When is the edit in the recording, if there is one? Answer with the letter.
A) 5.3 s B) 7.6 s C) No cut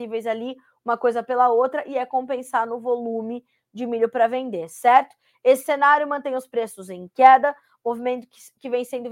C